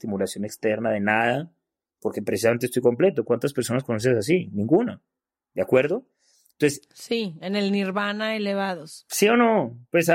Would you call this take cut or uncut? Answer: uncut